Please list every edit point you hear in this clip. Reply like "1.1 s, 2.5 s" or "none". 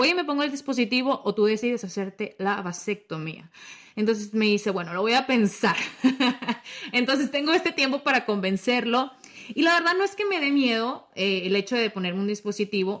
none